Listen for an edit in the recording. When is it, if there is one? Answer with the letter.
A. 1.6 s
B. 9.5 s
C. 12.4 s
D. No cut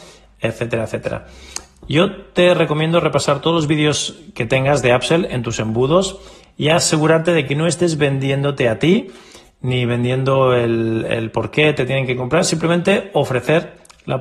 D